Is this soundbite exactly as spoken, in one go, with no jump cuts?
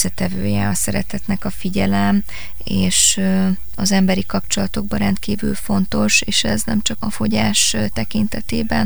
no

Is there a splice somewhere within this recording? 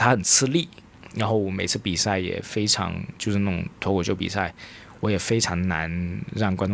no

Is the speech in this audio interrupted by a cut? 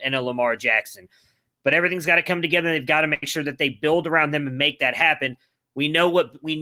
no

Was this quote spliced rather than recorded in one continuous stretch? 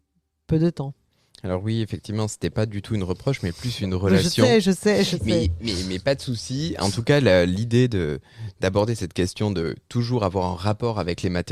no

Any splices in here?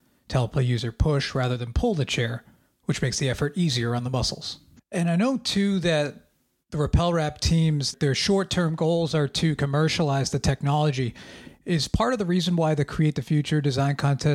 yes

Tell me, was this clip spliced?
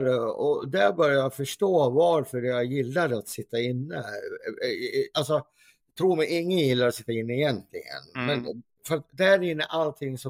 no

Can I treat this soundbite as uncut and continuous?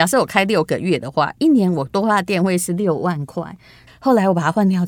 no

